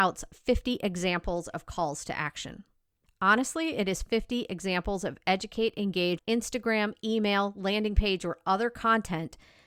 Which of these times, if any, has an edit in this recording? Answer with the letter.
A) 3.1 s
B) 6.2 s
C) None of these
B